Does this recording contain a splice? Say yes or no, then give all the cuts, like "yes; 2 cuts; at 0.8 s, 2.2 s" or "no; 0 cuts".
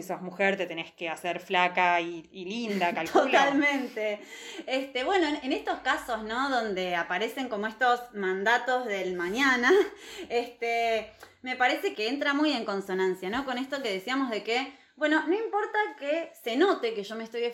yes; 1 cut; at 11.9 s